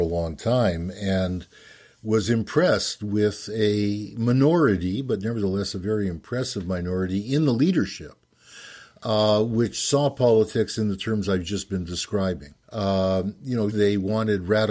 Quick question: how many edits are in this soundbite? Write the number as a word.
two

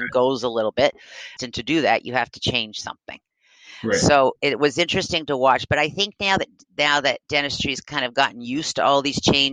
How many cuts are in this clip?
one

